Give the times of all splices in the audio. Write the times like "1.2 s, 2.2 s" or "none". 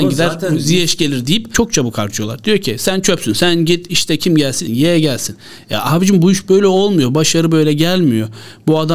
4.7 s